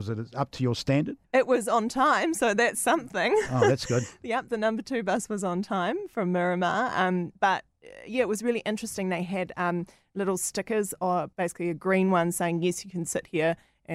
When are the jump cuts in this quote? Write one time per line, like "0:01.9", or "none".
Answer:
0:01.2
0:11.3